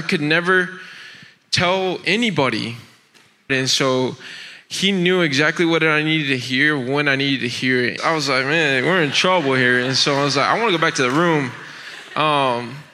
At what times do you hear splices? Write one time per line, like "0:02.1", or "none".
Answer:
0:03.5
0:08.0